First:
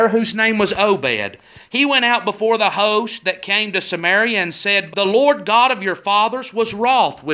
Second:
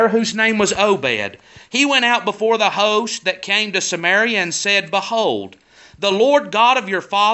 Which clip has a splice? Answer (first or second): first